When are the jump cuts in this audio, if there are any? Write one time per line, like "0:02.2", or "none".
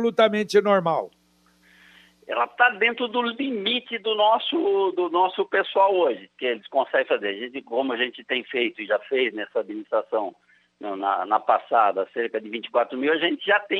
0:11.0